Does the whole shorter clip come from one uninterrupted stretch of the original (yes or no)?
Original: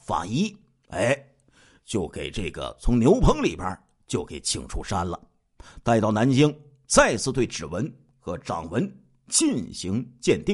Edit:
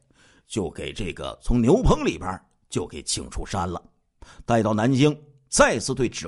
yes